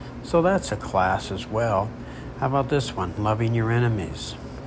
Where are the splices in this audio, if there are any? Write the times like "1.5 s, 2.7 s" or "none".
none